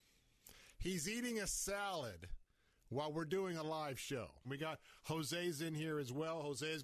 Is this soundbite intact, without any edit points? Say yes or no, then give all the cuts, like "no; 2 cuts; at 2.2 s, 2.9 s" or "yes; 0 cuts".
no; 1 cut; at 4.4 s